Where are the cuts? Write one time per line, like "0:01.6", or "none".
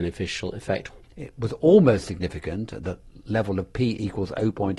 0:01.0